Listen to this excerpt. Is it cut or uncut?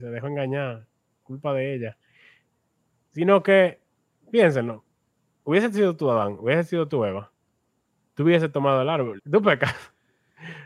cut